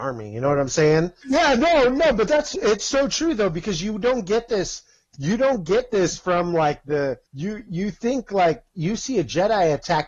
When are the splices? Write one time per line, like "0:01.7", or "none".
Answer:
0:01.2
0:07.3